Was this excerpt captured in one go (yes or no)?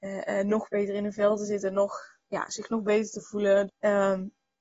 no